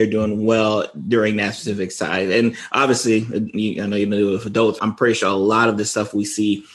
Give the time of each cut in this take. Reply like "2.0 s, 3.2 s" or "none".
4.8 s